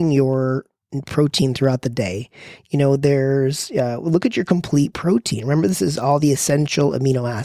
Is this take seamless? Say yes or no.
yes